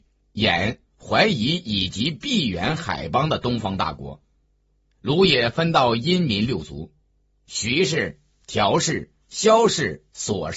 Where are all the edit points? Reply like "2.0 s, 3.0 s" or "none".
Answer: none